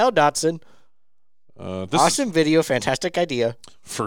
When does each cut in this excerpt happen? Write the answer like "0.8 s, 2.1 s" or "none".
none